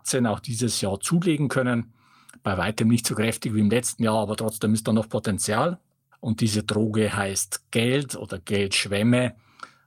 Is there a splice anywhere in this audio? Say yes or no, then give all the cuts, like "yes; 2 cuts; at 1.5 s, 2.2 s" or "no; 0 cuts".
yes; 1 cut; at 6.1 s